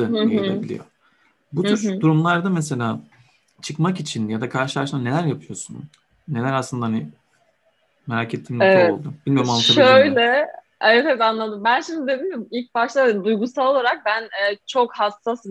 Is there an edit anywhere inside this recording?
no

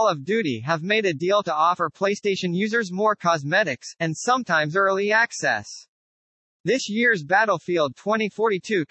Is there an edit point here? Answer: yes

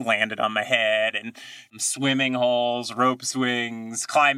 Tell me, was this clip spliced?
no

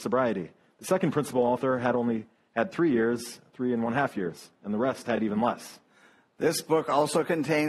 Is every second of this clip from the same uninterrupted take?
yes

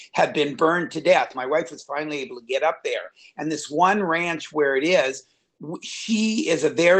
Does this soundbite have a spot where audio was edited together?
yes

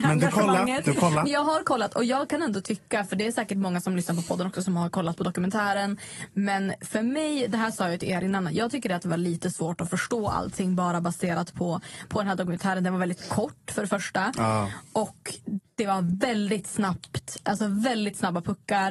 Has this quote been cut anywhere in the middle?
no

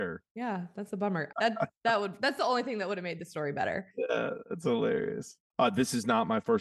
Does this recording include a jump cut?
yes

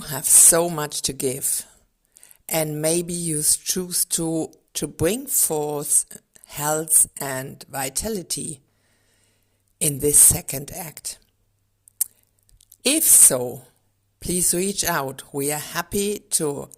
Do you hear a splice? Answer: yes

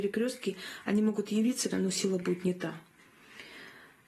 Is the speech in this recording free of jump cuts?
no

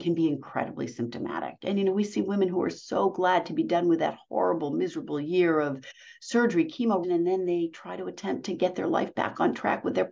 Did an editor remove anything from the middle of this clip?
yes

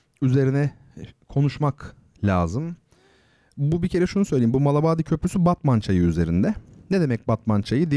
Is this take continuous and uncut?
yes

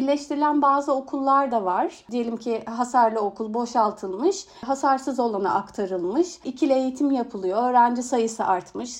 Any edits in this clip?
no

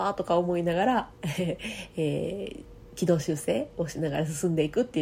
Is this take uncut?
yes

